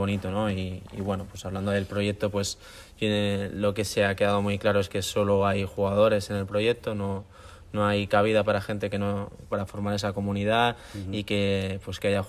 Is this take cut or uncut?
cut